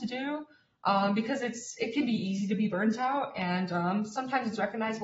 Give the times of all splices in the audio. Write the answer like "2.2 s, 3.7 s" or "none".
none